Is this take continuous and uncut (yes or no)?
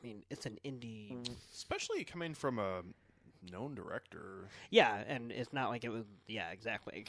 yes